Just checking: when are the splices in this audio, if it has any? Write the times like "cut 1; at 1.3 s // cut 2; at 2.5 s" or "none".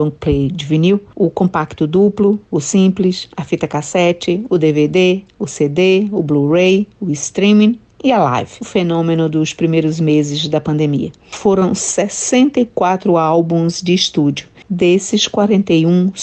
none